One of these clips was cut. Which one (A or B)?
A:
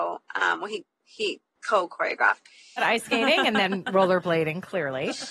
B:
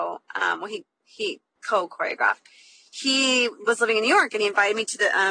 A